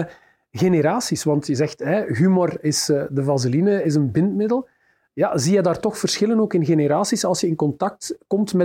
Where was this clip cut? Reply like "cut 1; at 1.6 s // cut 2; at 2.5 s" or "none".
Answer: none